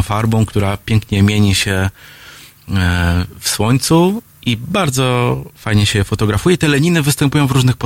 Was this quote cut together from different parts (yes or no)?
no